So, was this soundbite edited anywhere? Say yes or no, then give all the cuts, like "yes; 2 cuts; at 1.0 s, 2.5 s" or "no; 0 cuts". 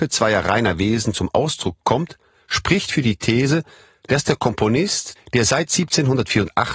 no; 0 cuts